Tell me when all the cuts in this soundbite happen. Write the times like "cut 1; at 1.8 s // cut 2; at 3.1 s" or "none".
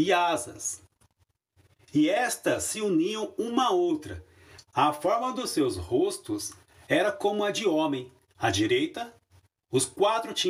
cut 1; at 4.6 s